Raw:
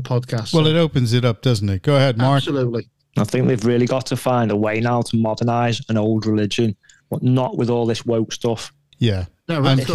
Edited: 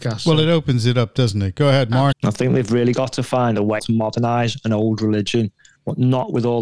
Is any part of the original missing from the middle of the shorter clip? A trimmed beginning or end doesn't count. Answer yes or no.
yes